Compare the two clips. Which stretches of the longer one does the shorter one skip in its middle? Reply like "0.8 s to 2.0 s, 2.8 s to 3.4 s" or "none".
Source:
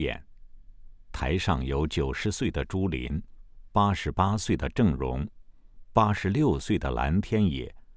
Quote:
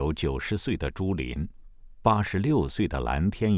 3.7 s to 5.9 s